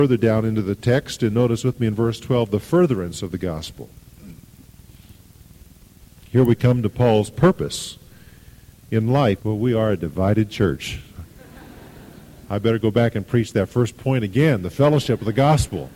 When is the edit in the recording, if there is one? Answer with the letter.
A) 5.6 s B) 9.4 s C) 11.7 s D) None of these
B